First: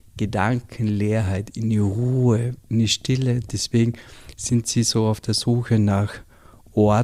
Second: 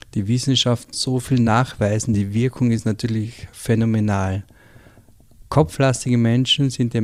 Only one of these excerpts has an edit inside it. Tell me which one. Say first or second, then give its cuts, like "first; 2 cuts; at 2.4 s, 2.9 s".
second; 1 cut; at 0.9 s